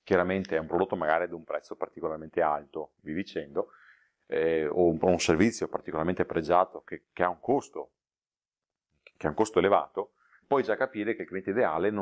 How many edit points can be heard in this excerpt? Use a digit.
1